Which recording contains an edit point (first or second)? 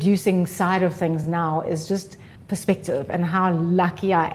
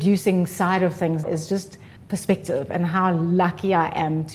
second